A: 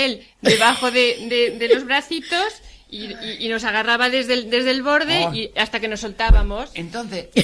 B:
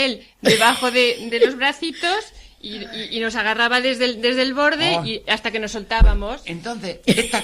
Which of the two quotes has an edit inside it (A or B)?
B